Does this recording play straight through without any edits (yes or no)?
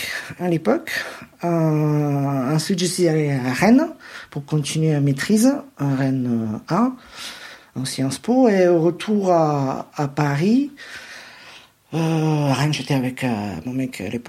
yes